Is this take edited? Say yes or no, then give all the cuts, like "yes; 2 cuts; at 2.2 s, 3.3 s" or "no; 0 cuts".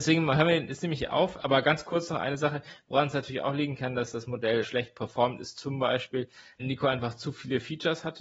yes; 2 cuts; at 4.6 s, 6.6 s